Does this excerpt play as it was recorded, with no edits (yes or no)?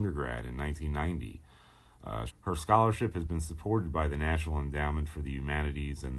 no